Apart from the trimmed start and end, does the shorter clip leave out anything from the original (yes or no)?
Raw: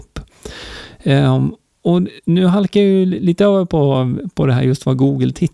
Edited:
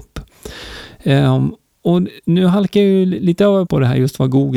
yes